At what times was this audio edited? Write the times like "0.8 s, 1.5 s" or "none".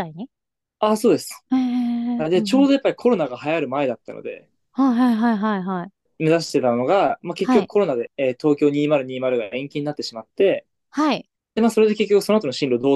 none